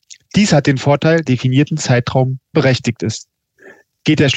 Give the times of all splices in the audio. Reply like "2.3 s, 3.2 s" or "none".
1.3 s, 2.5 s